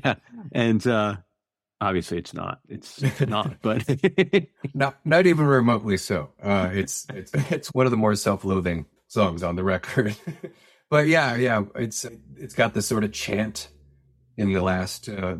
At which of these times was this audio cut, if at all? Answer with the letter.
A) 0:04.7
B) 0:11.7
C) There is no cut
C